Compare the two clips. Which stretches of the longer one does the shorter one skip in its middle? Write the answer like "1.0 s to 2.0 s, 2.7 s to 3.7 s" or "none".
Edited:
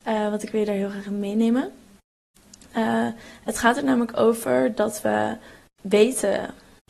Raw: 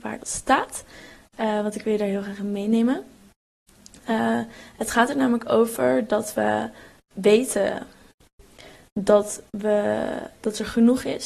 none